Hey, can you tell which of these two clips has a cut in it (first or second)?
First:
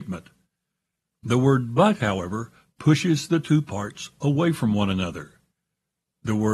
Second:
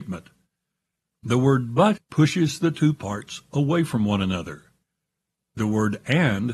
second